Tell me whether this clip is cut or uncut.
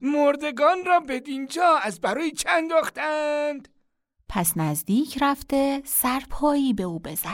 uncut